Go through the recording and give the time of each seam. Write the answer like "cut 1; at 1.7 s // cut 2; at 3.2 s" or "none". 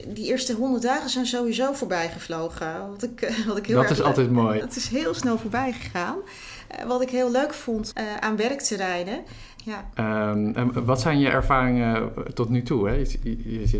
cut 1; at 4.6 s // cut 2; at 7.9 s // cut 3; at 9.6 s